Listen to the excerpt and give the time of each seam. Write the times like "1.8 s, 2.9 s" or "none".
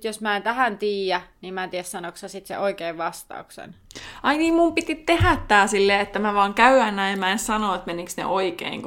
none